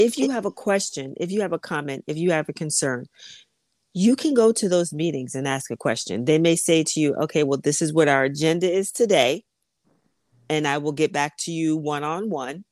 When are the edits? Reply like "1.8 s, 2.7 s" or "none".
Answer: none